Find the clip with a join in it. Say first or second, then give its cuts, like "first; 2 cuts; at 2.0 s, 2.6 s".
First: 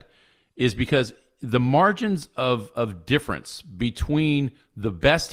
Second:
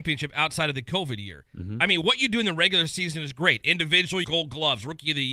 second; 1 cut; at 4.2 s